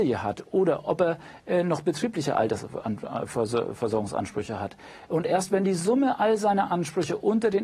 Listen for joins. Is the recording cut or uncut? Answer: uncut